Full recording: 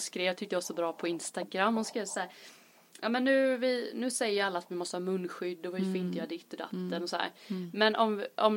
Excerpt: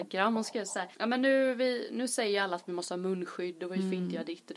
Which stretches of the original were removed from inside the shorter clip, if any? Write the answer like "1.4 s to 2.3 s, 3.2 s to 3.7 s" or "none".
2.4 s to 3.0 s